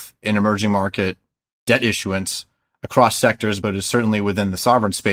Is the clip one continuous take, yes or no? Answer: yes